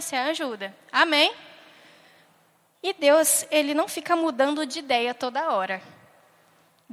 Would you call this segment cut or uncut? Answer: uncut